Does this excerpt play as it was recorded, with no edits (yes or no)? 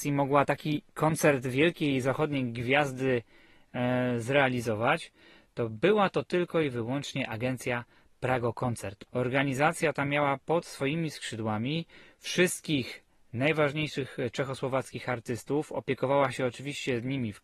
no